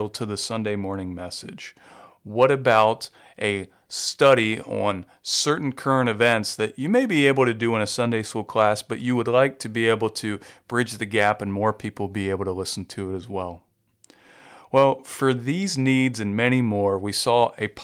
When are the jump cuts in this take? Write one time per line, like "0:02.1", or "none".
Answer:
none